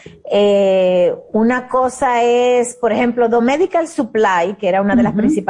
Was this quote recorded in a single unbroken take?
yes; 0 cuts

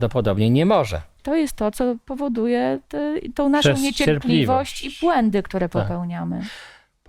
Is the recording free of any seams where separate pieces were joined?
no; 1 cut; at 1.2 s

